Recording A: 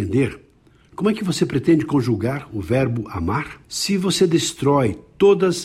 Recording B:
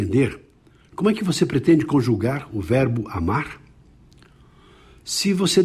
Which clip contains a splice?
A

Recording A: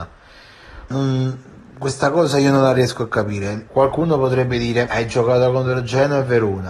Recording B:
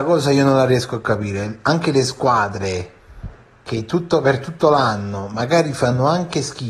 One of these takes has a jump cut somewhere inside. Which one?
A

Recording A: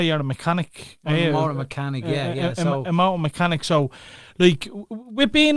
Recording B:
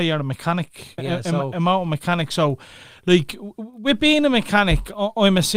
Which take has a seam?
B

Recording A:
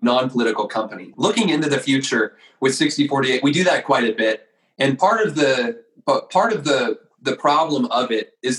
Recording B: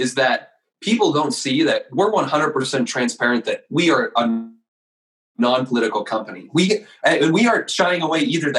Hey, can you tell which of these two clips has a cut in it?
A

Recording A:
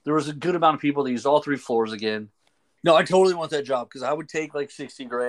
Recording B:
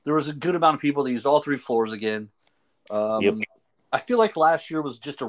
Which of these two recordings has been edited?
A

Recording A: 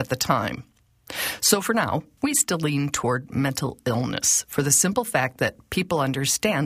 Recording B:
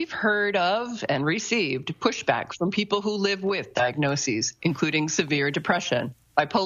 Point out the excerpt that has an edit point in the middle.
A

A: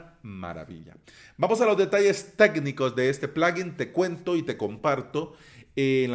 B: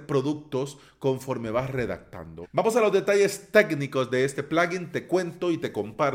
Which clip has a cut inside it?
B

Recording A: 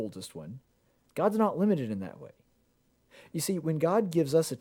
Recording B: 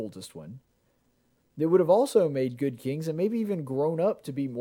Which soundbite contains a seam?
A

